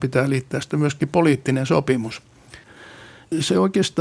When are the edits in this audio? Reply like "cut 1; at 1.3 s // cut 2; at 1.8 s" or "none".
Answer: none